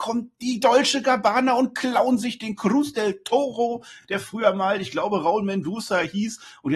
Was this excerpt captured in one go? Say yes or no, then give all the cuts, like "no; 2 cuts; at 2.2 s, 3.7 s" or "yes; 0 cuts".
yes; 0 cuts